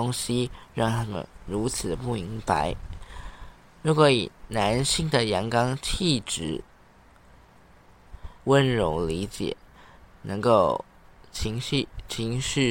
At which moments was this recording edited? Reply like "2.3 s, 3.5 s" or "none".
8.4 s